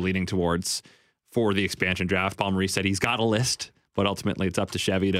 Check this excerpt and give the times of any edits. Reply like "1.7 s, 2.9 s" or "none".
none